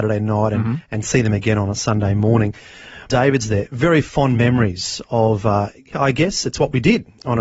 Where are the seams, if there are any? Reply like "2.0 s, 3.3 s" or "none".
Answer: 3.1 s, 5.9 s